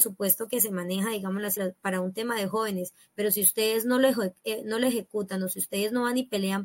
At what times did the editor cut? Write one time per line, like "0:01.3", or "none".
0:01.6

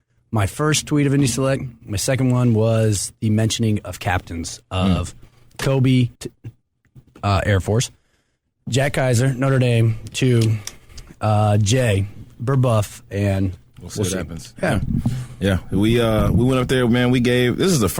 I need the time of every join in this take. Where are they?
0:06.2

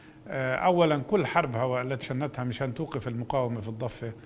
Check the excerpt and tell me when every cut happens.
0:02.0

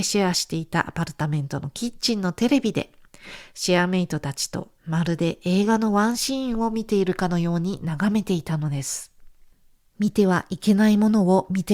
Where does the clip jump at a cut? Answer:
0:09.8

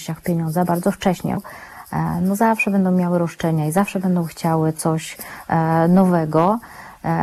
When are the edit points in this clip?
0:01.4

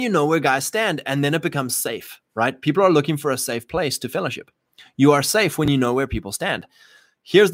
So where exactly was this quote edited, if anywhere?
none

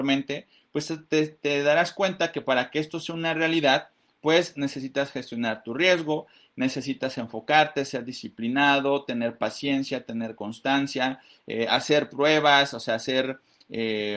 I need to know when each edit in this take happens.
none

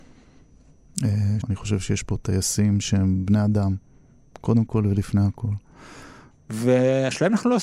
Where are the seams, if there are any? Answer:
0:01.4
0:06.3

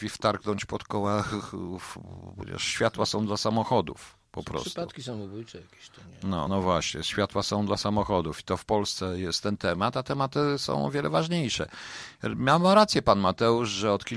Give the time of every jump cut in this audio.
none

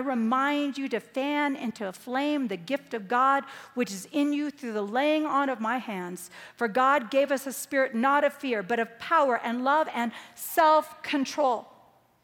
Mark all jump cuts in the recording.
none

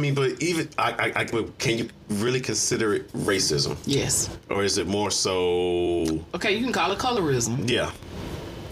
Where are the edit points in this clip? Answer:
0:01.3

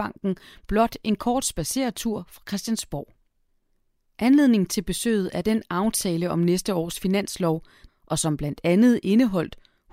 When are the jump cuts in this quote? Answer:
0:07.9

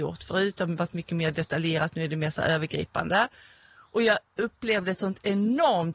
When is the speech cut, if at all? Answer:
none

